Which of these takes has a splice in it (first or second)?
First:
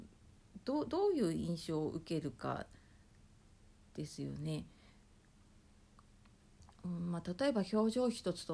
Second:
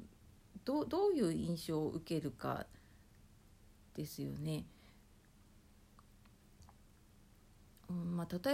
first